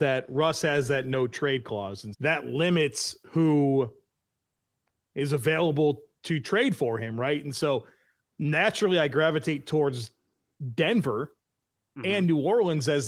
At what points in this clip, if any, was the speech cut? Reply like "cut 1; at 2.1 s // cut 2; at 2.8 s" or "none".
cut 1; at 2.1 s